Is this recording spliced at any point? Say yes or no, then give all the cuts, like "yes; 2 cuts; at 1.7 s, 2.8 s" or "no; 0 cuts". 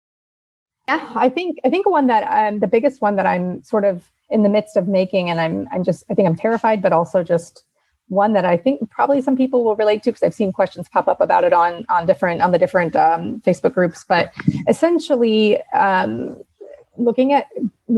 no; 0 cuts